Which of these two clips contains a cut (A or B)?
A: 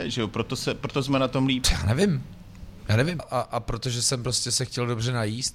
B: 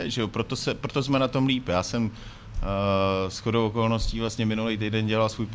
A